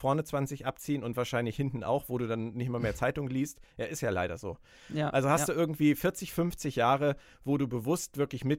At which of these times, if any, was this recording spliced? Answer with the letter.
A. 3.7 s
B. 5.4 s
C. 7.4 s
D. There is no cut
D